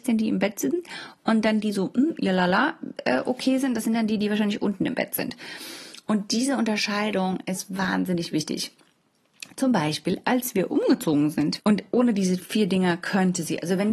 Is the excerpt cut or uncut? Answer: cut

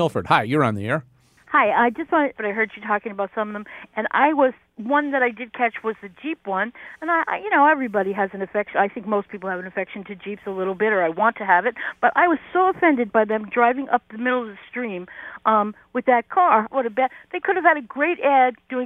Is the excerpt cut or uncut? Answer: cut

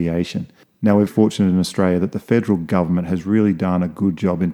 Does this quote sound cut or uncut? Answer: cut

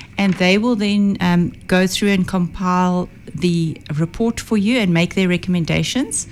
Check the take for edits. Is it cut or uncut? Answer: uncut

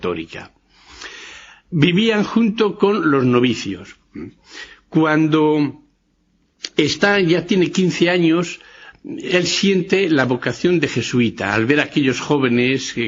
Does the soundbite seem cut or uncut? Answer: uncut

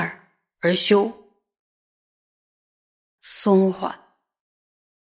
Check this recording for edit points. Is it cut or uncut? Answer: cut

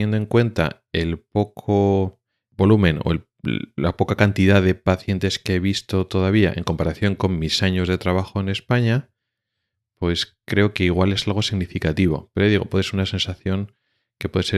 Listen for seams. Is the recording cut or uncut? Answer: uncut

